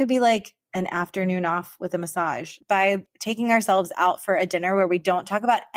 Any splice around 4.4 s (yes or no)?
no